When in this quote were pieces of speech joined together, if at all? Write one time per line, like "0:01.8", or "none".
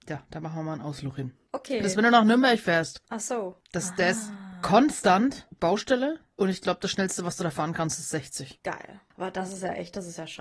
none